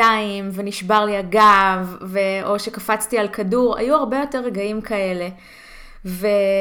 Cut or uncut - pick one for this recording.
uncut